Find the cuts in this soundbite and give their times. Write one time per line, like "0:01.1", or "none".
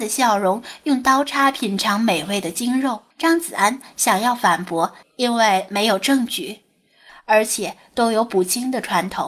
0:03.1
0:05.0
0:07.1